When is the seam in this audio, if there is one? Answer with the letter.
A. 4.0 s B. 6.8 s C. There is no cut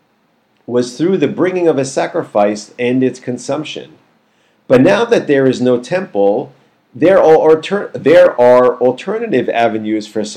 C